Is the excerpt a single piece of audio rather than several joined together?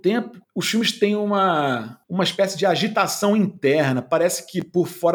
no; 1 cut; at 2.0 s

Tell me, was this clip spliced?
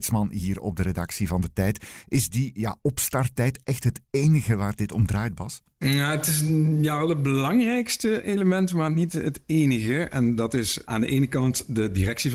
yes; 1 cut; at 10.1 s

